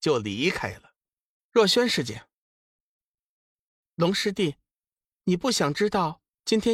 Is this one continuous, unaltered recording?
no; 1 cut; at 1.4 s

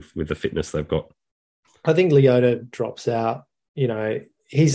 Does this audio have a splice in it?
no; 0 cuts

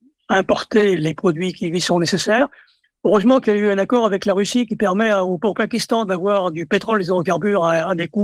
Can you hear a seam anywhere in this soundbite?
no; 0 cuts

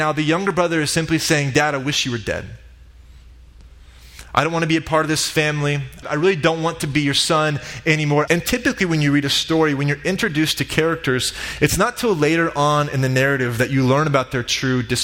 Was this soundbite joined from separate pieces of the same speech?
yes; 3 cuts; at 4.2 s, 6.0 s, 8.3 s

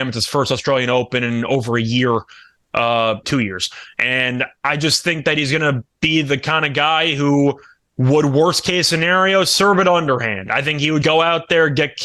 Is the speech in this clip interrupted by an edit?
yes; 2 cuts; at 3.2 s, 11.0 s

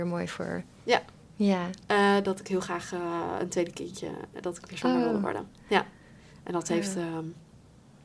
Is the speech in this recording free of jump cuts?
no; 1 cut; at 1.8 s

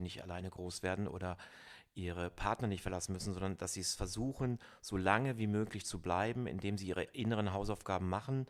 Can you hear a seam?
no; 0 cuts

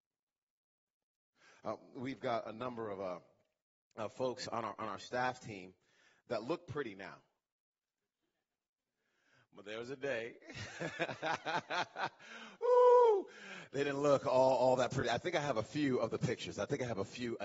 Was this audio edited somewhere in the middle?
no; 0 cuts

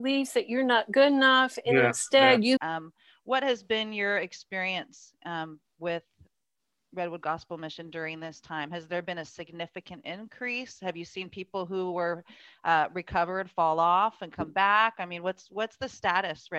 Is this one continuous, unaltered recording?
no; 1 cut; at 2.6 s

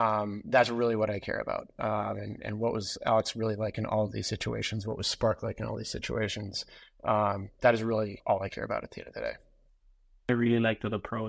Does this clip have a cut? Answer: no; 0 cuts

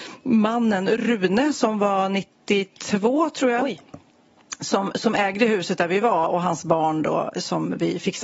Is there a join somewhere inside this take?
no; 0 cuts

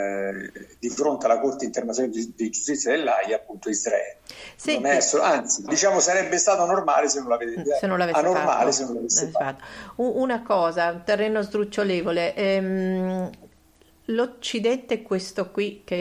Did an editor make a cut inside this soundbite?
yes; 1 cut; at 5.7 s

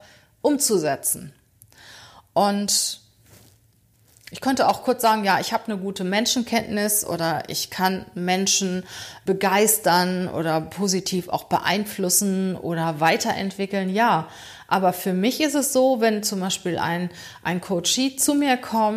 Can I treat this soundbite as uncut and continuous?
no; 1 cut; at 9.3 s

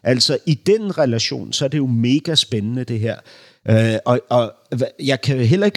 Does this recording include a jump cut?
no; 0 cuts

